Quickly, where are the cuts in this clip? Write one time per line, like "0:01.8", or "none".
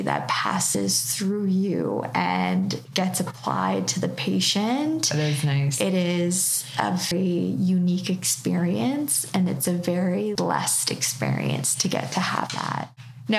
0:07.1
0:10.4